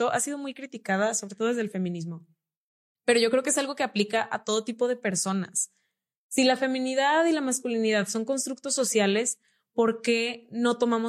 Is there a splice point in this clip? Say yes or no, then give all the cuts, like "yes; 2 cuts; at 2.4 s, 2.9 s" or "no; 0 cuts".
no; 0 cuts